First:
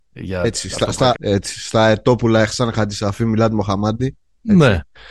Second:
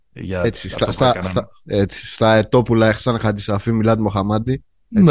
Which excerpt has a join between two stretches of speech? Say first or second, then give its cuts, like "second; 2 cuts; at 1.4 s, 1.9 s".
first; 1 cut; at 1.2 s